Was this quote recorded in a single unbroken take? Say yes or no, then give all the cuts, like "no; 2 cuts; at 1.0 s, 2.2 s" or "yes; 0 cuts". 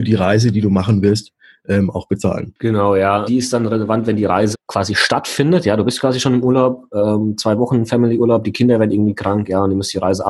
no; 2 cuts; at 3.3 s, 4.5 s